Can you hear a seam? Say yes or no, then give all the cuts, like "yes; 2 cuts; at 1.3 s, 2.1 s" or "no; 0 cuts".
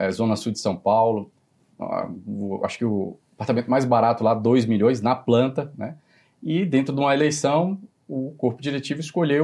no; 0 cuts